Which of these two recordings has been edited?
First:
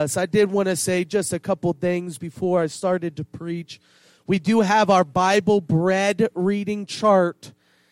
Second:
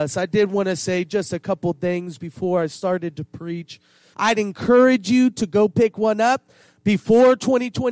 second; 1 cut; at 4.1 s

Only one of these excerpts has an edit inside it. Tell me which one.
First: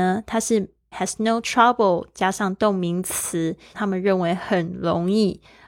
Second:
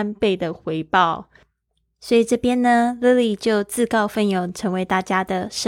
first; 2 cuts; at 0.9 s, 3.7 s

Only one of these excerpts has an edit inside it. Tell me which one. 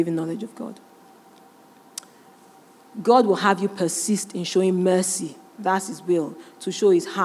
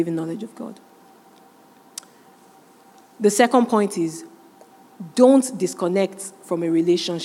first; 1 cut; at 2.8 s

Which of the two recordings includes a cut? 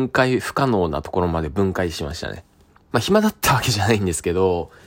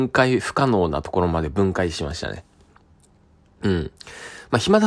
first; 1 cut; at 2.9 s

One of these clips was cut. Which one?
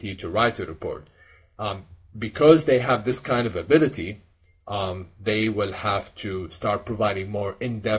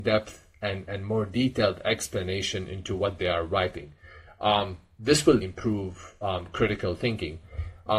second; 1 cut; at 5.4 s

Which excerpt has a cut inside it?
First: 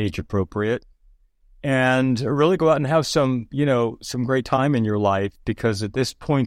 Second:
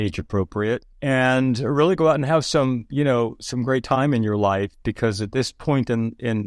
second; 1 cut; at 0.9 s

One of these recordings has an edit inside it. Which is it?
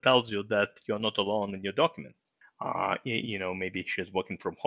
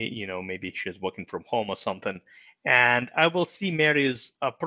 first; 1 cut; at 2.4 s

